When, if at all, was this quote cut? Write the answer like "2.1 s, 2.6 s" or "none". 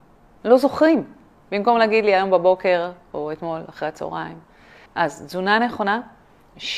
4.9 s